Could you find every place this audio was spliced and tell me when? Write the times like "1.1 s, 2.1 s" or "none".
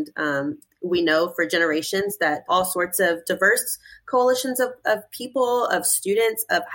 2.5 s